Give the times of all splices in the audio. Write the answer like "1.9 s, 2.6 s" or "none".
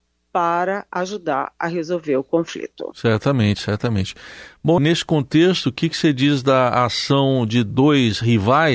4.8 s